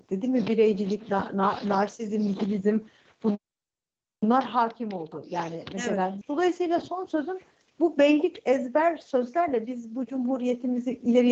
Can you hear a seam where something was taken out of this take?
yes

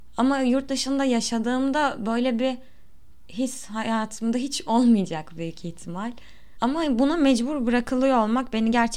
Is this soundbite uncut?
no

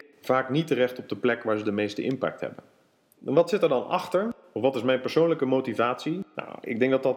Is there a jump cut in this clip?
yes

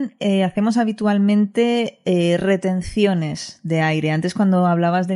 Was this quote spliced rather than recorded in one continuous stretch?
no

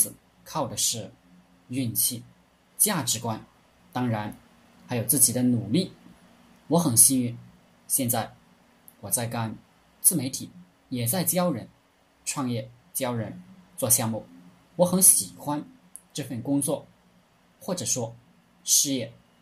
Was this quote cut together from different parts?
yes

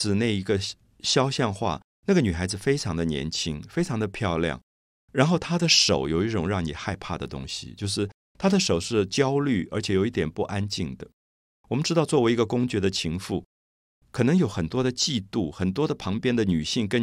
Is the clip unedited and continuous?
yes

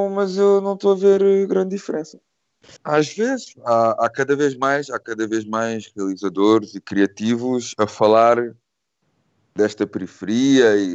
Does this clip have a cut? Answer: yes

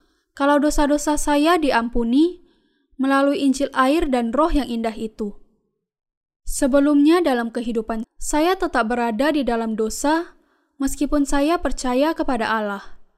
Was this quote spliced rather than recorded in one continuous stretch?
yes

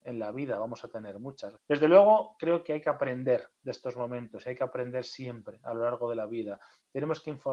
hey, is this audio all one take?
no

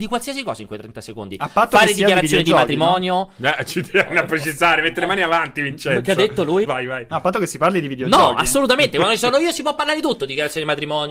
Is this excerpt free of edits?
no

